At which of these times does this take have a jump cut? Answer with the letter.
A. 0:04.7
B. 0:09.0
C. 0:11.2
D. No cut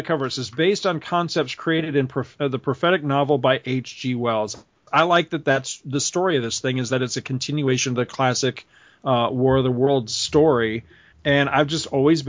D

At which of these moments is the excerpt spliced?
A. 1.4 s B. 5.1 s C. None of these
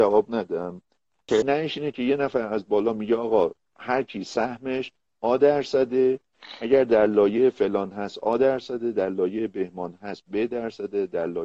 A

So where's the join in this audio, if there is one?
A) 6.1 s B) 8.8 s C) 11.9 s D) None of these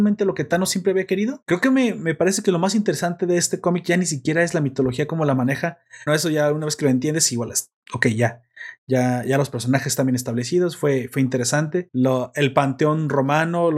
A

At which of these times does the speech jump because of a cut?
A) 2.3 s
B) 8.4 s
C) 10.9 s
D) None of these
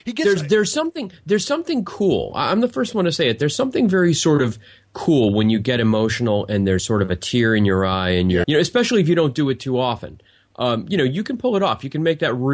B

